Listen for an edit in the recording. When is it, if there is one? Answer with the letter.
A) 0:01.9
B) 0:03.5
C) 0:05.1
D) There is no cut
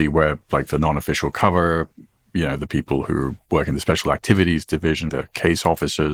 C